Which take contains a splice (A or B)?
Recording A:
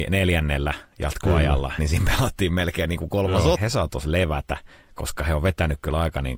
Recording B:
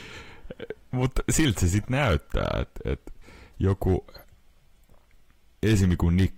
A